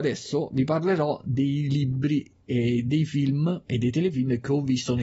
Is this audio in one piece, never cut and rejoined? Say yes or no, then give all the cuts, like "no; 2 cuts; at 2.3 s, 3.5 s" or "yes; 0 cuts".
yes; 0 cuts